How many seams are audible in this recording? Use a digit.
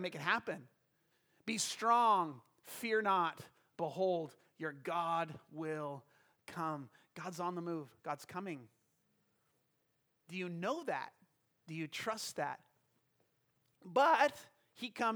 0